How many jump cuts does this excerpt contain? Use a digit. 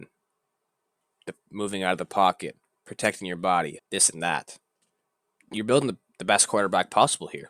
1